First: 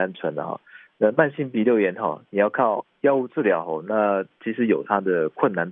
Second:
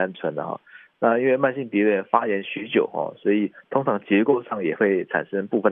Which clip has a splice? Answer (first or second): second